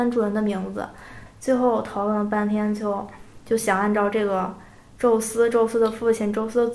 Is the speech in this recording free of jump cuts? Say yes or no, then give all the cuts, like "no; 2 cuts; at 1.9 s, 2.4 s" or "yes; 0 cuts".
no; 1 cut; at 1.3 s